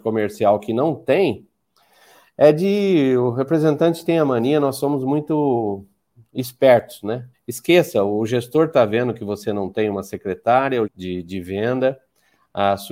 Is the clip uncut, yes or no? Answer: no